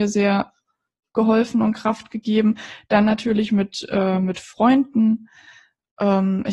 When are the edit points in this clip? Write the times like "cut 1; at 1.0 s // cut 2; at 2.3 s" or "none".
none